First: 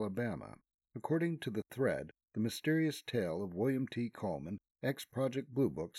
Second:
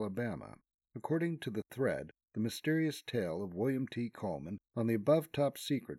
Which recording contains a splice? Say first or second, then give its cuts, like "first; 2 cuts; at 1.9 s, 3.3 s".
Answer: second; 1 cut; at 4.7 s